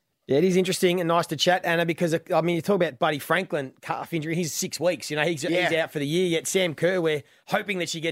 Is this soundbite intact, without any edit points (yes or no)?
yes